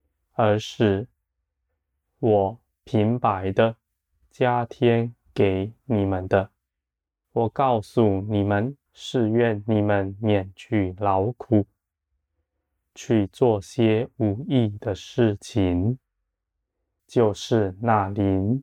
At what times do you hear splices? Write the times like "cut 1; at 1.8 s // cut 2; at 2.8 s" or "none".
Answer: cut 1; at 7.2 s // cut 2; at 8.9 s // cut 3; at 17.0 s